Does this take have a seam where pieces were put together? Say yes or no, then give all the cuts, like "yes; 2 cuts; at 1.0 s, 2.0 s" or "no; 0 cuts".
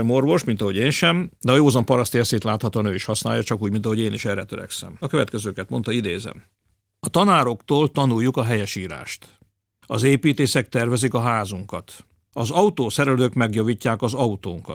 no; 0 cuts